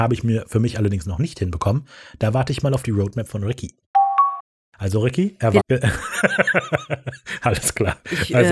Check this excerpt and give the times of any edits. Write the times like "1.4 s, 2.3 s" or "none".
5.6 s